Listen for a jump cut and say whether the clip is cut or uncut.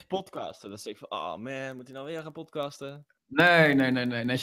uncut